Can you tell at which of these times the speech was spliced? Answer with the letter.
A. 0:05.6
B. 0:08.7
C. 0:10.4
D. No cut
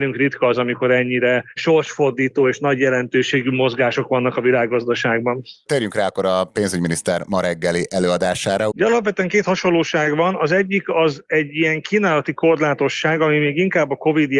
B